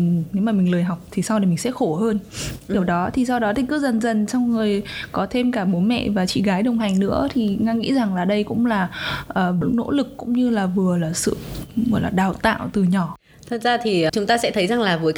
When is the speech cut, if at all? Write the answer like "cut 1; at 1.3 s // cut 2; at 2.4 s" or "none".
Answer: cut 1; at 9.6 s // cut 2; at 14.1 s